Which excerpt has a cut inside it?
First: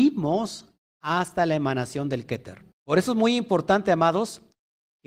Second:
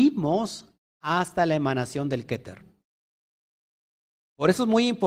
first; 1 cut; at 2.7 s

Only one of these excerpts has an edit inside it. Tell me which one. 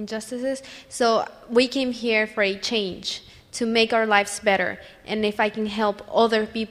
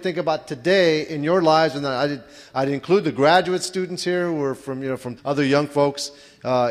second; 1 cut; at 5.2 s

